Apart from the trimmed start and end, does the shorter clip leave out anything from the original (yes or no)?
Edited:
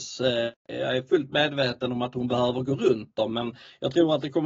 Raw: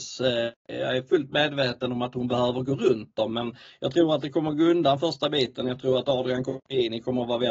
no